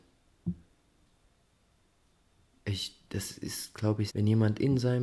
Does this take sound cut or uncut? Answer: cut